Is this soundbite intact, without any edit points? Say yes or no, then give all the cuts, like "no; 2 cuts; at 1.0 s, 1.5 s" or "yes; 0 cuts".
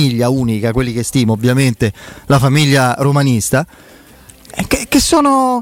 yes; 0 cuts